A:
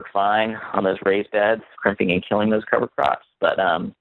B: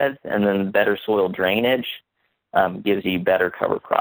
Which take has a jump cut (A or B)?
A